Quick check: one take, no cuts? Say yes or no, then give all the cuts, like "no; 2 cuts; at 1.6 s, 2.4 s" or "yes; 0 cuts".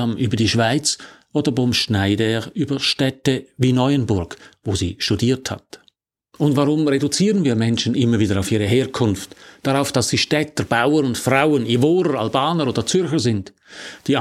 yes; 0 cuts